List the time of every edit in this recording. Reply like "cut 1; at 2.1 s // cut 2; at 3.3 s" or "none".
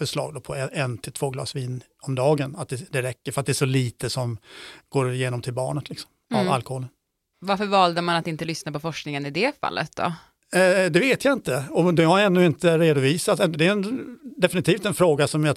none